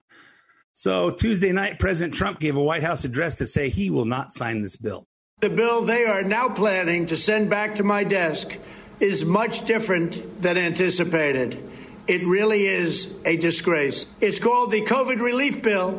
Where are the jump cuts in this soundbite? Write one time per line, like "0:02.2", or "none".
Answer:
none